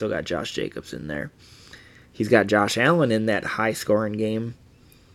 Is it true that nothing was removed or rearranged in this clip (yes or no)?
yes